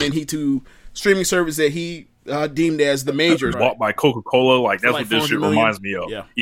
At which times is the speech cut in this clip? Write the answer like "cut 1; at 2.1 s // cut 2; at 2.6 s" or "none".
cut 1; at 3.5 s